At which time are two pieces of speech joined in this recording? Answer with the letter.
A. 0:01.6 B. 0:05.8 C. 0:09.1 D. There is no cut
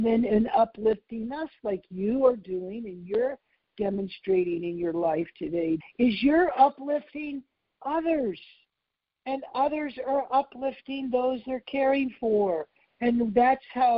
B